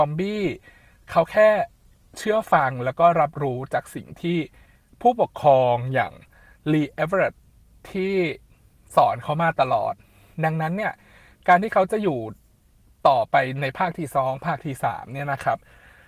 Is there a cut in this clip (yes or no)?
no